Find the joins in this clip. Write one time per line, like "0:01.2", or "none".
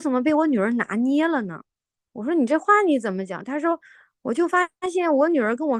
none